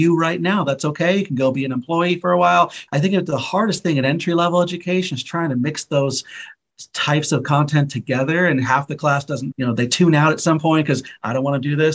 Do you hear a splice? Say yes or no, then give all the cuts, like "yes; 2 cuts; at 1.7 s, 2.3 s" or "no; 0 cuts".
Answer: yes; 2 cuts; at 2.9 s, 9.5 s